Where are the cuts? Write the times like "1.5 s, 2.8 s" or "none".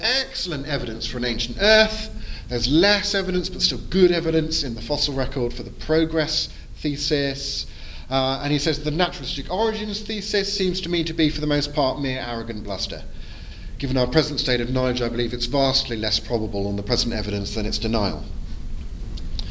none